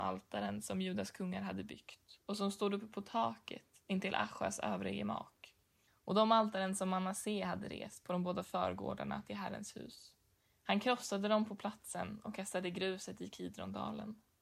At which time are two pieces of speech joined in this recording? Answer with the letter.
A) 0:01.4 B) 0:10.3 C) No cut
C